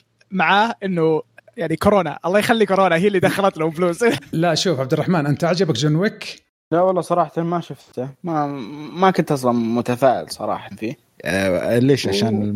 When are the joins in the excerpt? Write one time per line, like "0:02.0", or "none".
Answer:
0:04.2
0:06.5